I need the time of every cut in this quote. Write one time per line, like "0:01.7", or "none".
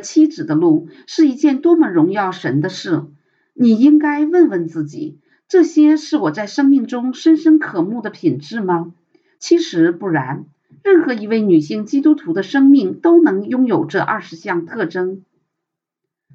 0:09.4